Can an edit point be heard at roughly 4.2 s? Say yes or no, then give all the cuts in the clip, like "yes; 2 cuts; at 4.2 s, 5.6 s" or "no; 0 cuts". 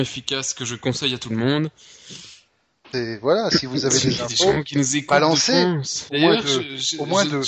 no; 2 cuts; at 2.9 s, 6.1 s